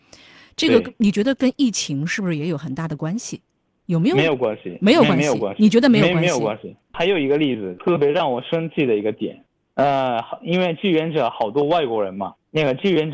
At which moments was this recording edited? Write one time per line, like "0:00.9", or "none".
none